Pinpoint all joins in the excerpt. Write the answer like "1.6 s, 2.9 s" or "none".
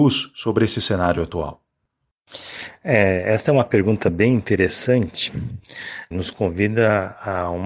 6.1 s